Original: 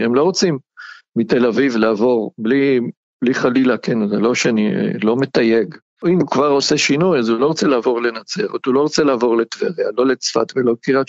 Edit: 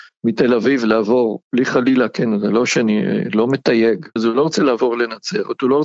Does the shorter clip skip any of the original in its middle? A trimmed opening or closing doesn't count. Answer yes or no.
yes